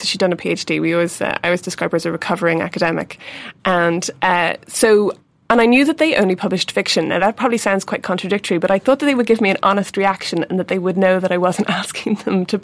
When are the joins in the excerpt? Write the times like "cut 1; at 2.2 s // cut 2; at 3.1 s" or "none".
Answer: none